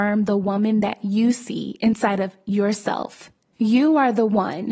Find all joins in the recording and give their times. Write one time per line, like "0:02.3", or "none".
0:03.5